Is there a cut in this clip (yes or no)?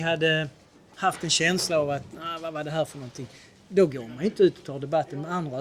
yes